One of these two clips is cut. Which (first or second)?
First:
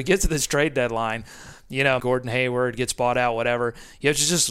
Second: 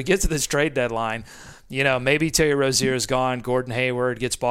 first